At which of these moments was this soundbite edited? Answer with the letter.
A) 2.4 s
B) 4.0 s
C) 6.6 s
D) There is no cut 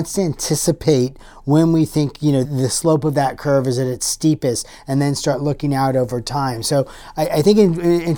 A